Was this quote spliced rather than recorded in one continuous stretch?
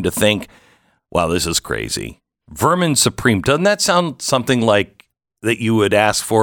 yes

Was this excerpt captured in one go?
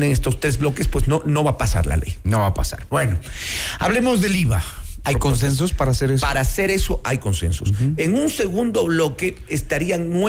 no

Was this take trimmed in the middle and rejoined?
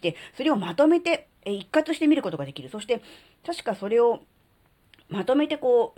no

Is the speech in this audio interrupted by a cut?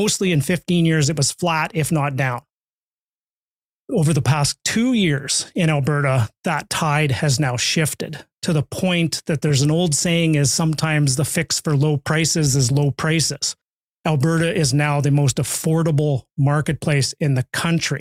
no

